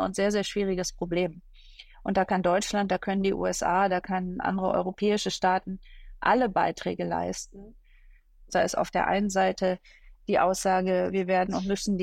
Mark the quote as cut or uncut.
cut